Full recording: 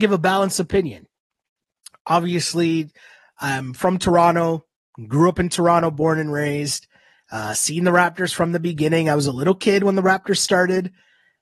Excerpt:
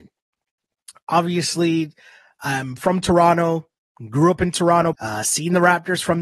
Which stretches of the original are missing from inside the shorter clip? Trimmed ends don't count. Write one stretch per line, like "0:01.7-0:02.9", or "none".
0:05.9-0:07.2

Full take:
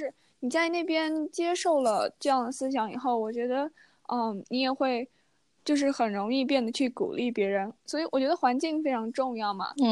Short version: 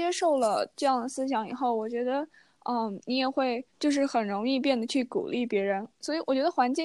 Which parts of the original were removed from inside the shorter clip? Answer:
0:05.1-0:05.5

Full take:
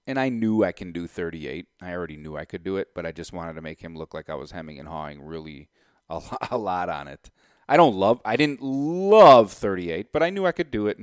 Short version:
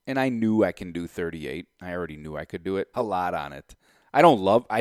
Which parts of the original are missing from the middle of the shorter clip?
0:02.9-0:06.5

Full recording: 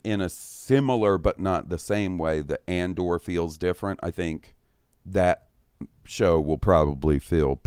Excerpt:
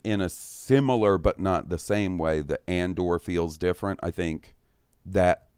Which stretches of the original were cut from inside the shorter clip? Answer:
none

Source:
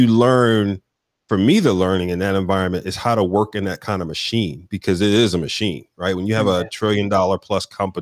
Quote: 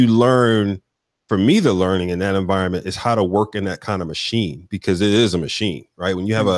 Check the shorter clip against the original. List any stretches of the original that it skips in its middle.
none

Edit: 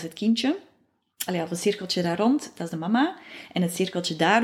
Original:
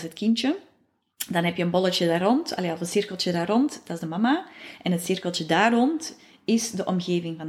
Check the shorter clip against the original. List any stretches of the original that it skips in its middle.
0:01.3-0:02.6

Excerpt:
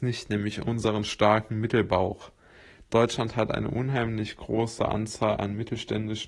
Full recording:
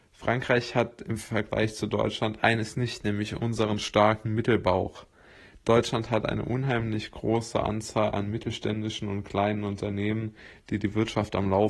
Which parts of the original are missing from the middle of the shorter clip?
none

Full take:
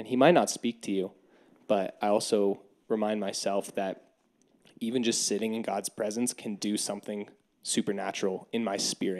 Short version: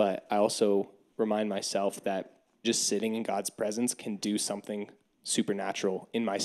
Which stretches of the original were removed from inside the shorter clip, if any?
0:04.4-0:05.0

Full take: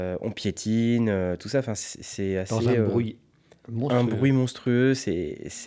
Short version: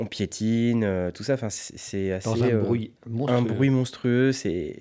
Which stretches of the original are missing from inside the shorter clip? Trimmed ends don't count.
0:03.2-0:03.6

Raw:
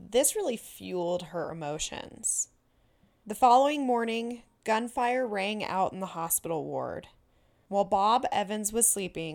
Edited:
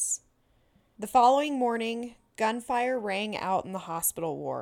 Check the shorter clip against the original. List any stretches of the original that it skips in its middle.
none

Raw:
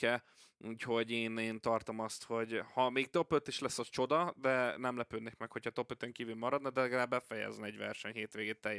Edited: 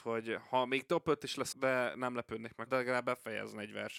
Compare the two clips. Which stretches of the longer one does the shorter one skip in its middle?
0:03.8-0:04.3
0:05.5-0:06.7

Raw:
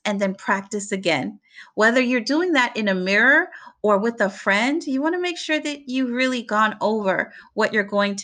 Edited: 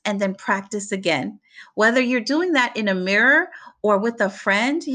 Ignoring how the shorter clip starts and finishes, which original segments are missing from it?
none

